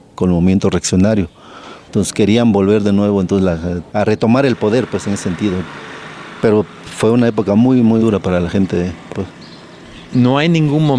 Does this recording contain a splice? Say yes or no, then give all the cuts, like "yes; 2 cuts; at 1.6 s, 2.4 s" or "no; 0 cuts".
yes; 2 cuts; at 8.0 s, 9.1 s